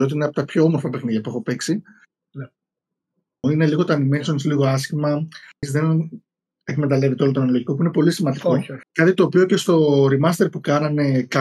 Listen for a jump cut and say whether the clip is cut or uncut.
cut